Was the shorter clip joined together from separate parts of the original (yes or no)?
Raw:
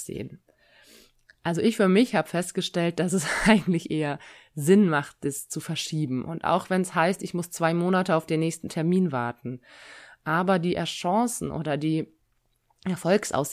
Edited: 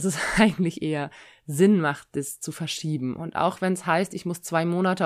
no